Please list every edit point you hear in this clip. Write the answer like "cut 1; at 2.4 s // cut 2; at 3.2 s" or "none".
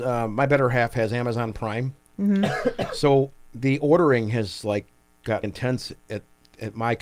cut 1; at 5.4 s